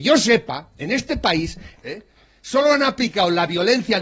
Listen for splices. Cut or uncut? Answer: cut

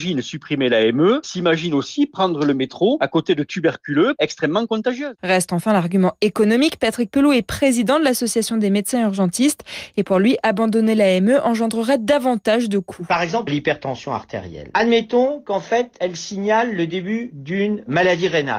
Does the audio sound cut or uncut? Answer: uncut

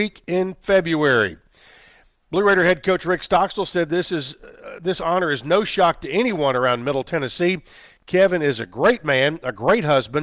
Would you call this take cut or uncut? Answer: uncut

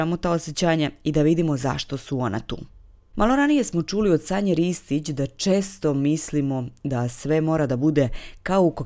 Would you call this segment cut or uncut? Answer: uncut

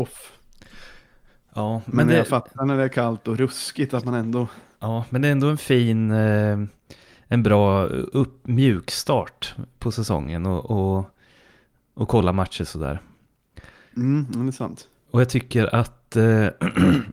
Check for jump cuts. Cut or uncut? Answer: uncut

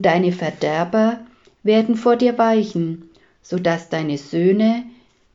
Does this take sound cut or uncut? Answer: uncut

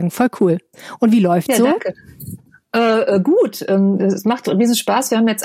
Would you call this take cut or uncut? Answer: uncut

